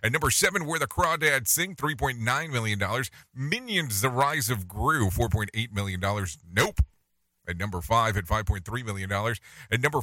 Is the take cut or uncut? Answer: uncut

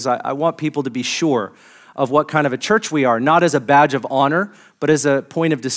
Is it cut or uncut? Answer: uncut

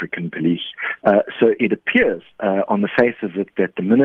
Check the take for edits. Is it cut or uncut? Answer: cut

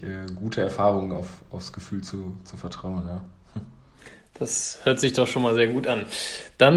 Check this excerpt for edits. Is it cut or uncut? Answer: uncut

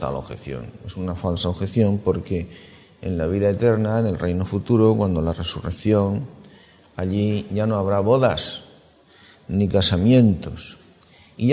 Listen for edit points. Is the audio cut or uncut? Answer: uncut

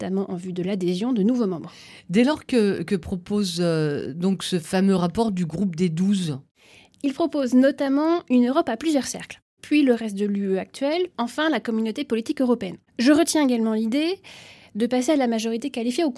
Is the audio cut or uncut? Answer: cut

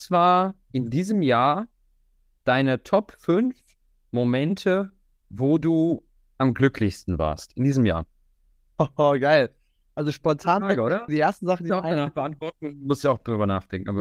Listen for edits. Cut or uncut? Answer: cut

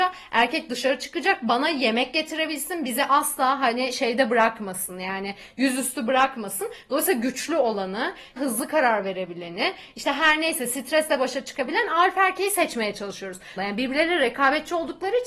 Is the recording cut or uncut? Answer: cut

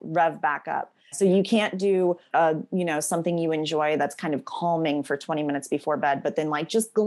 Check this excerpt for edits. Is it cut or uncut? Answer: cut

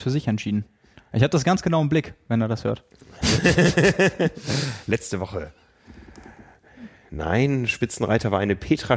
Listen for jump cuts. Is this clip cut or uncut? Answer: uncut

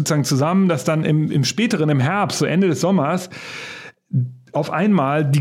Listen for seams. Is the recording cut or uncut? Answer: uncut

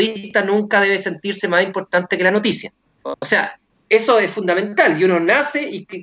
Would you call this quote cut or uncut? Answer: uncut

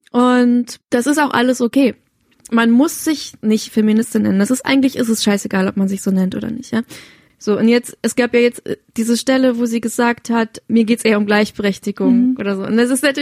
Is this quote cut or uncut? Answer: uncut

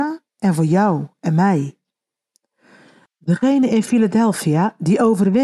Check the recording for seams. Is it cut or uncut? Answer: uncut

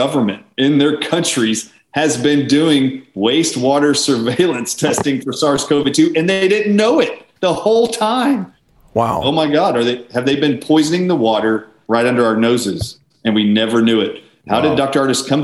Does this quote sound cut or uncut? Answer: uncut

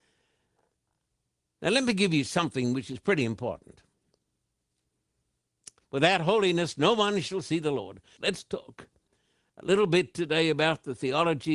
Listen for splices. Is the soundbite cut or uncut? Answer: cut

